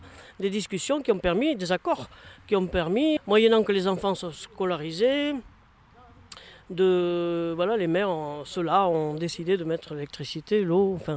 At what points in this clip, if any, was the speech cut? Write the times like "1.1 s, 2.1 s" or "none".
3.2 s